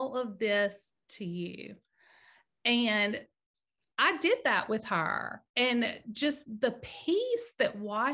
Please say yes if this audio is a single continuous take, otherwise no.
no